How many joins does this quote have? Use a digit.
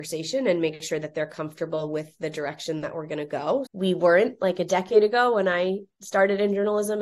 1